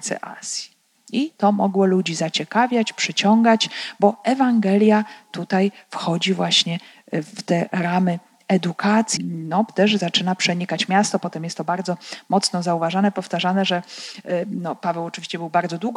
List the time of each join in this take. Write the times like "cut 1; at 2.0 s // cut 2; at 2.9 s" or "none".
cut 1; at 0.9 s // cut 2; at 9.2 s